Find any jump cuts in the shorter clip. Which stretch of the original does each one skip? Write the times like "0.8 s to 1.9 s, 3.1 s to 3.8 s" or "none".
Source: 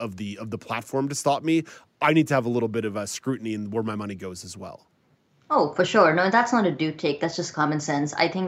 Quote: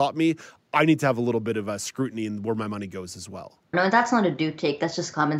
5.0 s to 6.1 s